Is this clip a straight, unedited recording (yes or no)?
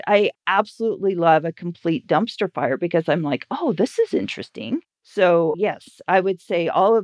no